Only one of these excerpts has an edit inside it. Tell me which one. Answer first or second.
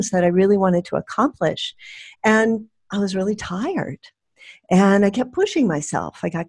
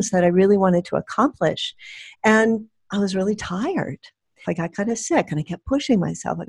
second